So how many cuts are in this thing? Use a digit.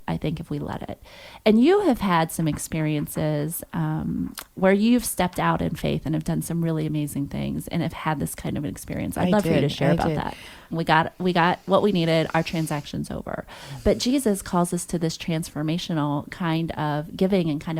1